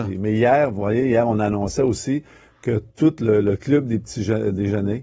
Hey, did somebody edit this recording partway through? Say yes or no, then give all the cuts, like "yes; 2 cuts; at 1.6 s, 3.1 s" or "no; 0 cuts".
no; 0 cuts